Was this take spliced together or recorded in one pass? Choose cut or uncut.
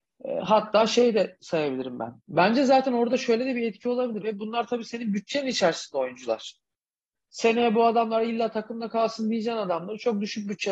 cut